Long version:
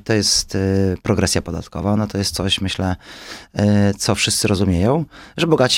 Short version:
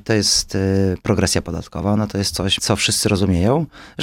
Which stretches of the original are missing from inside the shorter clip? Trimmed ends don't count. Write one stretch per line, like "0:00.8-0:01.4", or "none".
0:02.6-0:04.0